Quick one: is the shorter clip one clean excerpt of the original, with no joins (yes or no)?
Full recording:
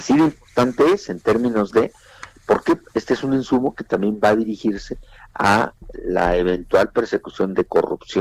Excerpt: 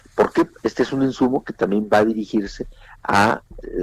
yes